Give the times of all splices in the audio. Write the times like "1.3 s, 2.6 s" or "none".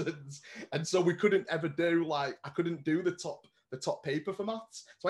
none

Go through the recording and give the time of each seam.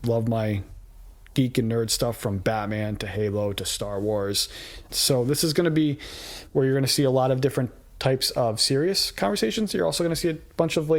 4.9 s

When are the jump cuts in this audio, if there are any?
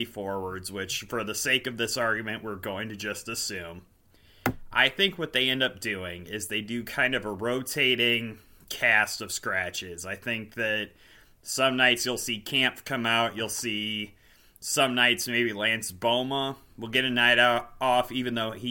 none

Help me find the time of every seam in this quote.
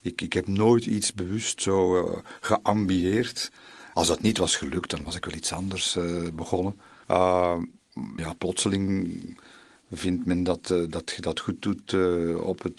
3.9 s, 7.0 s, 8.2 s

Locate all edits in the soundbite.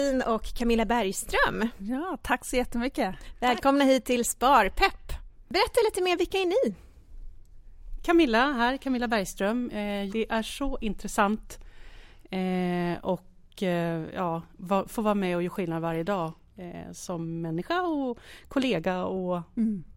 10.1 s

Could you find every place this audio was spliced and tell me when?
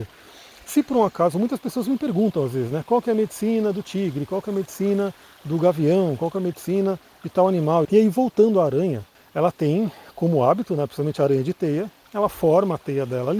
7.8 s, 9.1 s

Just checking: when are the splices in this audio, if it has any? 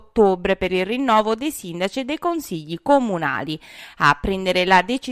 none

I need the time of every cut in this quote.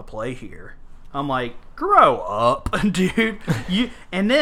none

